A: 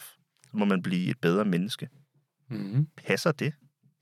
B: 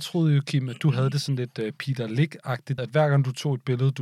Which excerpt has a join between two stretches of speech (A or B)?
B